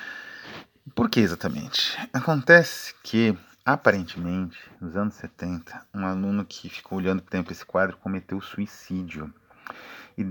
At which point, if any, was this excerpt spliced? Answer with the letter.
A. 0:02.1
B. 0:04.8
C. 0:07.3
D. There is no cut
C